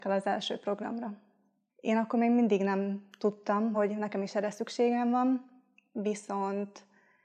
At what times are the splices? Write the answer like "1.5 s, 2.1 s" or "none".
1.7 s, 3.7 s